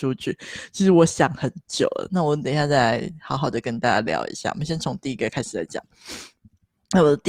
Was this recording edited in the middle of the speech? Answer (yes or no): no